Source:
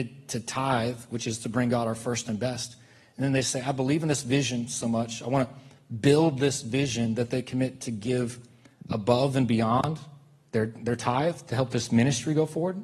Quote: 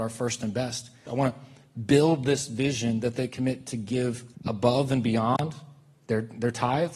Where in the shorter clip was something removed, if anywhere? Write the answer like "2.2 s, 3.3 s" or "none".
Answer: 1.1 s, 4.4 s

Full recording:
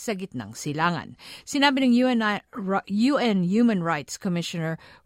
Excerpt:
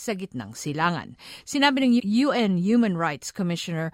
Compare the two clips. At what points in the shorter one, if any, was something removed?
2.0 s

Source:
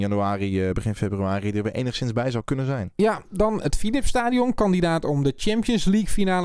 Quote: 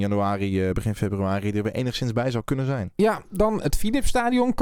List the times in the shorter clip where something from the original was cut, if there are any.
none

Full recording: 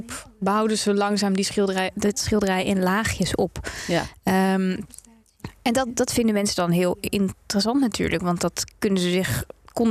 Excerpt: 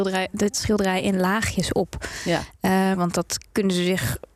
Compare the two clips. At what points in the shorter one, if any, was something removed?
2.9 s

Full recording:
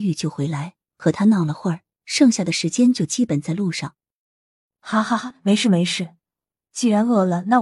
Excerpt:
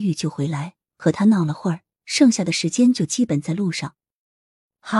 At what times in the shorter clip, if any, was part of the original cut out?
none

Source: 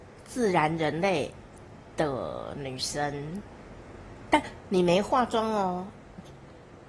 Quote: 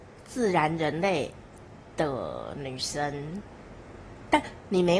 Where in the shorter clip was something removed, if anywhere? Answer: none

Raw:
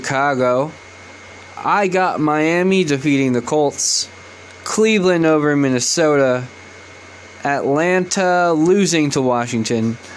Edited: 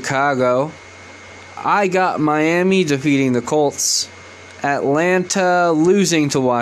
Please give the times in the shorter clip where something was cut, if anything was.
4.6 s

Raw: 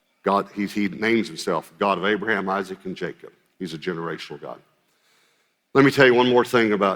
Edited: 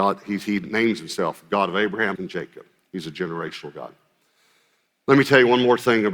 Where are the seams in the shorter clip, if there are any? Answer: 2.1 s

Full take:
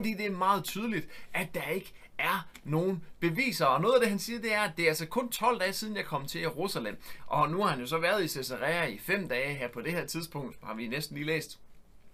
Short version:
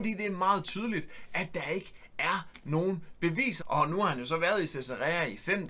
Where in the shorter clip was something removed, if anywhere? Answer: 3.6 s

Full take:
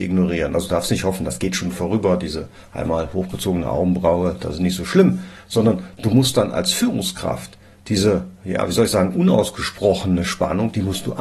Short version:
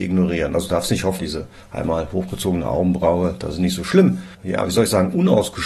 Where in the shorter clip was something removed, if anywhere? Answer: 1.2 s, 4.3 s

